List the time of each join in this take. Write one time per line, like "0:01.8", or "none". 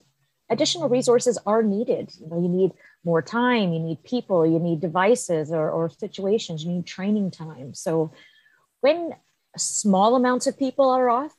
none